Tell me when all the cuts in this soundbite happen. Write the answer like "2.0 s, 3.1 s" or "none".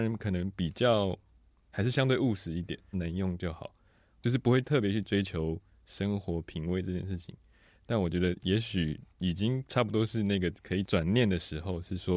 2.9 s, 9.1 s